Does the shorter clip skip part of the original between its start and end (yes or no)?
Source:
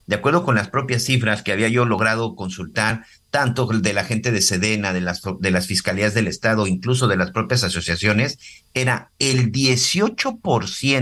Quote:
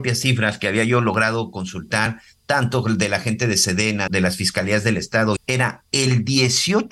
yes